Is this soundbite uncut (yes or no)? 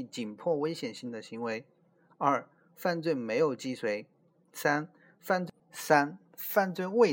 no